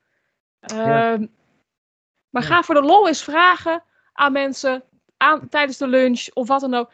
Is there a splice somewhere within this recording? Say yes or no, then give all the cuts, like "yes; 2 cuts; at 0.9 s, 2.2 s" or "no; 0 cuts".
yes; 1 cut; at 2.1 s